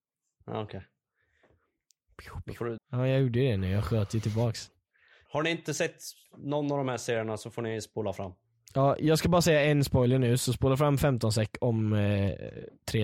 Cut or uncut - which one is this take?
cut